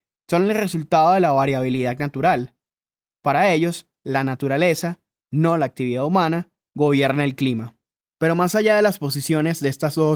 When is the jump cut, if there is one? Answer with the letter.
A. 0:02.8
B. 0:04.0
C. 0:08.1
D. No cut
D